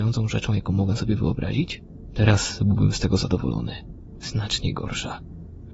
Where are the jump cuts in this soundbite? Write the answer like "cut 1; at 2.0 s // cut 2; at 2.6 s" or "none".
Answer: cut 1; at 4.2 s